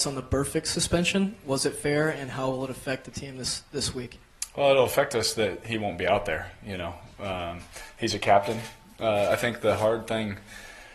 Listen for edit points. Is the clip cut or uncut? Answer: uncut